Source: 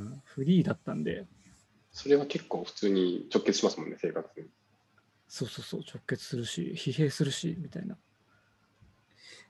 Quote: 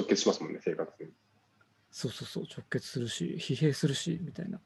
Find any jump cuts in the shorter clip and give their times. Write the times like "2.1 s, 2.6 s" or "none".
none